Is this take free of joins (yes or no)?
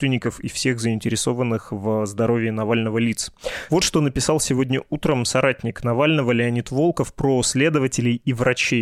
no